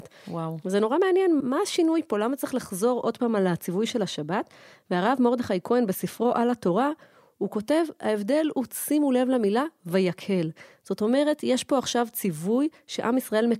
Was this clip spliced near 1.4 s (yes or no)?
yes